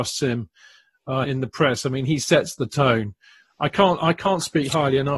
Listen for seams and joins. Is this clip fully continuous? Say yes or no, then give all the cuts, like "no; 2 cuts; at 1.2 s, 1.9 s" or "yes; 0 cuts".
no; 1 cut; at 1.2 s